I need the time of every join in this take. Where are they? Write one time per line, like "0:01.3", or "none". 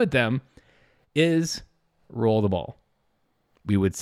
none